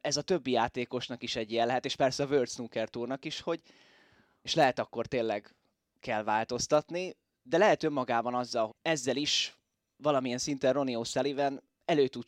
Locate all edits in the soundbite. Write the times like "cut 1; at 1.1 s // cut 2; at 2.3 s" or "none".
cut 1; at 4.5 s // cut 2; at 8.7 s